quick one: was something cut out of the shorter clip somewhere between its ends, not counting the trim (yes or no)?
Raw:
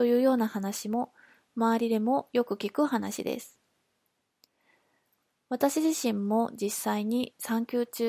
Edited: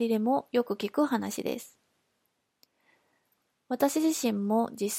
no